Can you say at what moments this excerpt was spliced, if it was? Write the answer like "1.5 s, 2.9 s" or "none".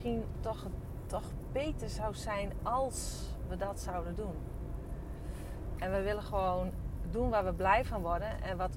5.8 s